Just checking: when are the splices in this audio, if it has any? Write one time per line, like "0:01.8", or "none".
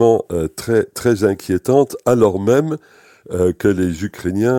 none

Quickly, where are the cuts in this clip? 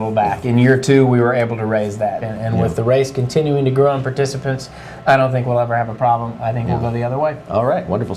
0:02.2

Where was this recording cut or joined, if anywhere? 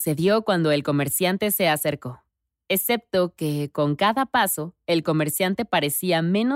none

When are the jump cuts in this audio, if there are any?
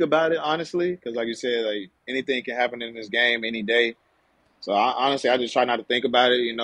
none

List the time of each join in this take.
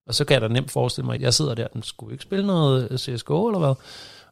0:01.2

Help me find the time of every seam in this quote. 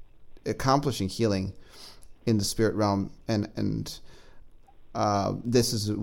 none

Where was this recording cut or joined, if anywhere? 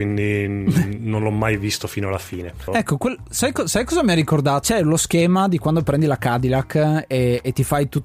0:02.7
0:04.6

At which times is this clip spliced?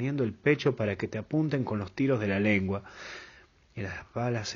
none

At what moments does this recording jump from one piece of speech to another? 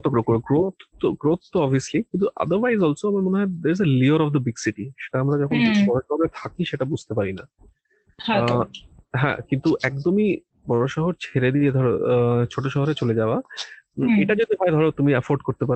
none

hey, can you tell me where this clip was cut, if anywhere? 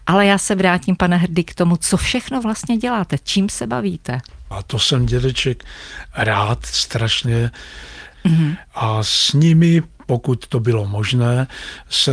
0:04.5
0:08.1

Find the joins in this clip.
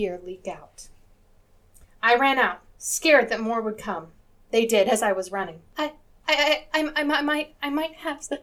0:05.7

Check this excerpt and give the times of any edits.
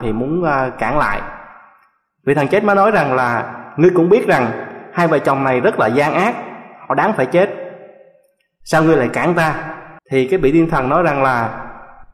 0:10.0

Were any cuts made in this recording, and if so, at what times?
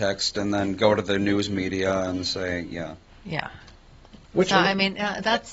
0:03.1
0:04.3

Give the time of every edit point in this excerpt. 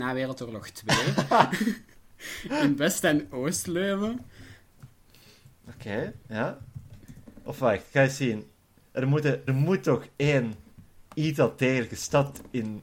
0:09.5

